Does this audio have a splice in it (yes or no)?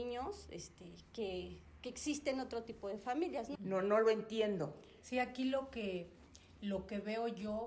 yes